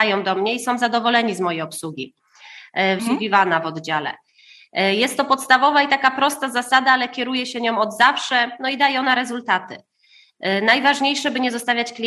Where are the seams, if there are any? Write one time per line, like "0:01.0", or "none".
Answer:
0:03.0

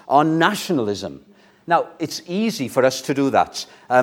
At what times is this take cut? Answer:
0:01.5

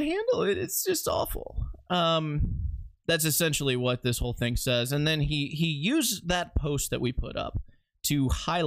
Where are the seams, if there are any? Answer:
none

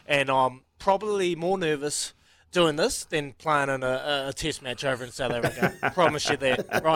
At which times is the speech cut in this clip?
none

